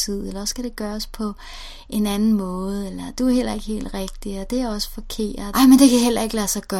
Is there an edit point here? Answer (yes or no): yes